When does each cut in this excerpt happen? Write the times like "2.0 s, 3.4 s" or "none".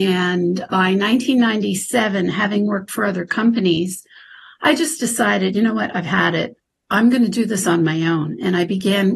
none